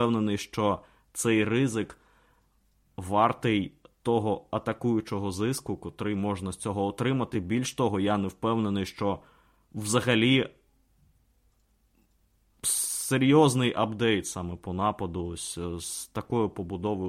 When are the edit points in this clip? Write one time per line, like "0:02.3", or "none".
none